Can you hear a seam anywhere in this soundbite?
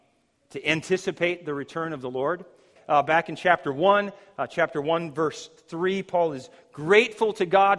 yes; 1 cut; at 2.8 s

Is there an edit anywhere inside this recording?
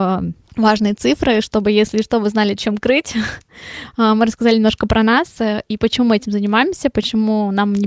no; 0 cuts

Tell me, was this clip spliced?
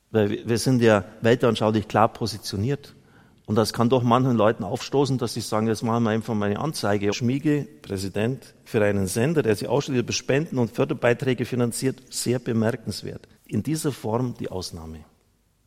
yes; 2 cuts; at 7.1 s, 13.4 s

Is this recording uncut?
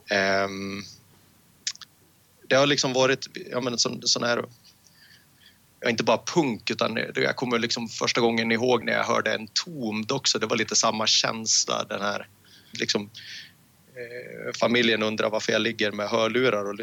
no; 2 cuts; at 8.8 s, 12.7 s

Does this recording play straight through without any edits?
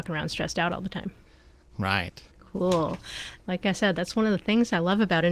no; 2 cuts; at 2.3 s, 3.4 s

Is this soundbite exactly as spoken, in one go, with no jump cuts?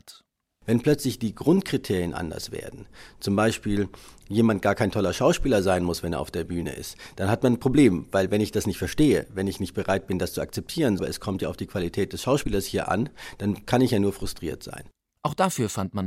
no; 2 cuts; at 11.0 s, 15.2 s

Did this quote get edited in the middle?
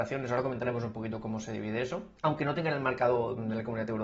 yes; 1 cut; at 2.2 s

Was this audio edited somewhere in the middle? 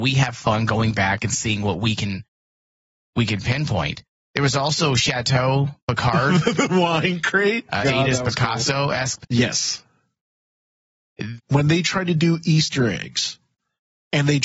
yes; 3 cuts; at 7.8 s, 9.2 s, 11.4 s

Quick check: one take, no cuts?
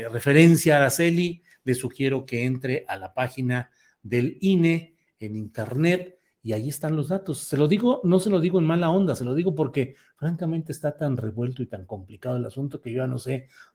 yes; 0 cuts

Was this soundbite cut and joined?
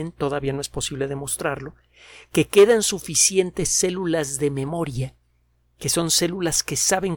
no; 0 cuts

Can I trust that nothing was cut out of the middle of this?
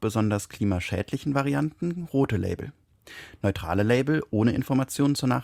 yes; 0 cuts

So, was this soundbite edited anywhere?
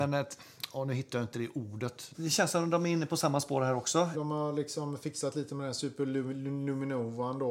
yes; 2 cuts; at 2.1 s, 4.1 s

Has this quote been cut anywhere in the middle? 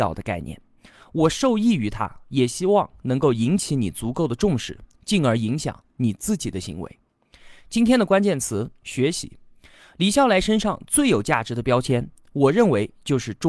no; 0 cuts

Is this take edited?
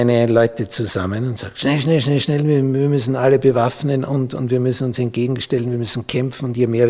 no; 0 cuts

